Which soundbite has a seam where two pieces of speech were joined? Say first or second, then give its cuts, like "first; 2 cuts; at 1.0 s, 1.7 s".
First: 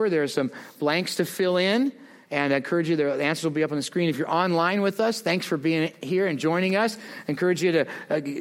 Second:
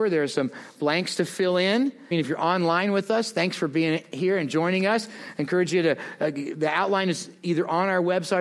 second; 1 cut; at 2.1 s